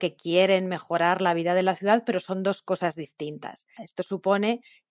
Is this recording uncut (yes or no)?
no